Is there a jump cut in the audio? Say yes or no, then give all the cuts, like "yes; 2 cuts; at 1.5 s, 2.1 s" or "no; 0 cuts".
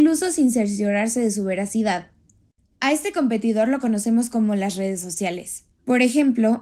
yes; 1 cut; at 5.7 s